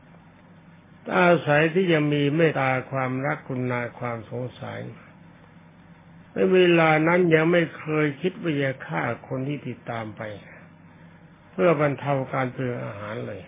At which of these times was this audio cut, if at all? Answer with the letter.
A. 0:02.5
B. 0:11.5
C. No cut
A